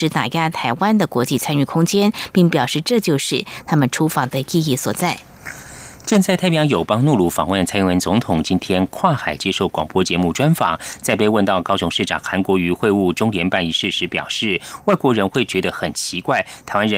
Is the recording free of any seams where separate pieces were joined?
yes; 0 cuts

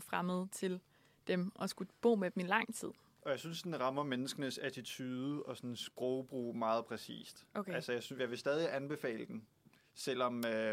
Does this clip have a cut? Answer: no; 0 cuts

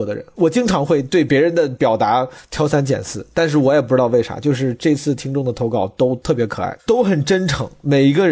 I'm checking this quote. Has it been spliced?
yes; 1 cut; at 6.8 s

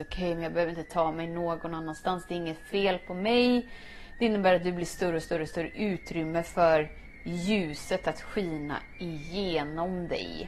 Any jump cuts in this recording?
no; 0 cuts

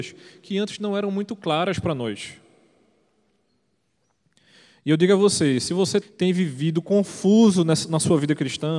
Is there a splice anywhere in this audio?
yes; 1 cut; at 6.0 s

